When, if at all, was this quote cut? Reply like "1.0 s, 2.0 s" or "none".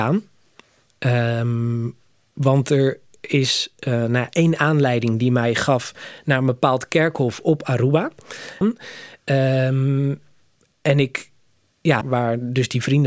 8.6 s, 12.0 s